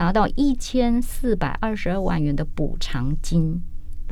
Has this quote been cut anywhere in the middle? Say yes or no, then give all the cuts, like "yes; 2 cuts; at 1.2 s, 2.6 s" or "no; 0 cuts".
no; 0 cuts